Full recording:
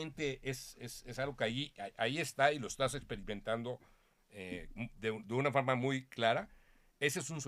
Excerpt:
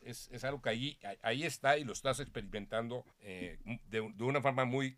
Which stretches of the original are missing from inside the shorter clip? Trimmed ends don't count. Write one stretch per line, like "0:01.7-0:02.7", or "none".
0:03.9-0:04.2